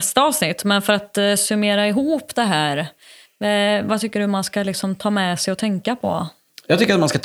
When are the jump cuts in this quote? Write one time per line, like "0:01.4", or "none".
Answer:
none

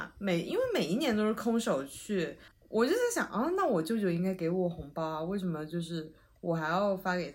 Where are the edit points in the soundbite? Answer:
none

